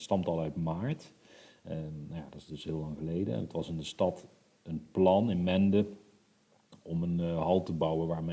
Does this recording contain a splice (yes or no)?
no